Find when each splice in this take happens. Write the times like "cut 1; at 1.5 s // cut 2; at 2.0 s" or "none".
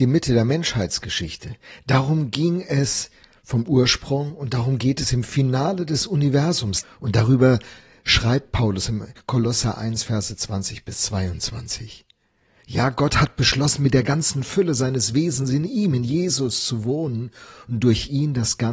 cut 1; at 6.8 s